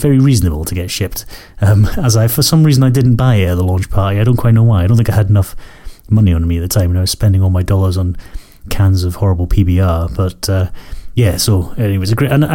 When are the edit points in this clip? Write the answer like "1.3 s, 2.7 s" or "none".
none